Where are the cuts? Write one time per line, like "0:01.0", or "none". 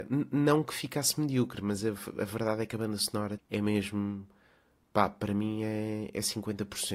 0:03.4